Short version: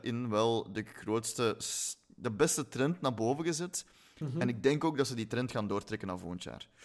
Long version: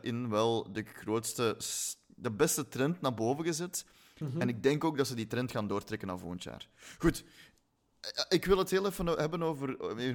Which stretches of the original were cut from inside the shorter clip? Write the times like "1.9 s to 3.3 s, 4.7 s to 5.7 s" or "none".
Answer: none